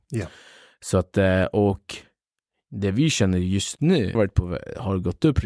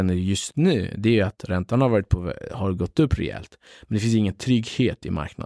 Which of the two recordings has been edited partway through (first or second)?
first